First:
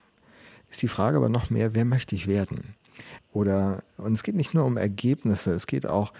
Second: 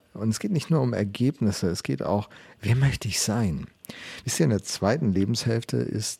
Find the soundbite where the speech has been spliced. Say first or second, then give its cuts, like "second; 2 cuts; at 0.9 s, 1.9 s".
first; 1 cut; at 3.2 s